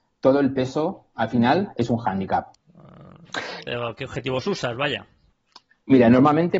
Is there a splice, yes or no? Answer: yes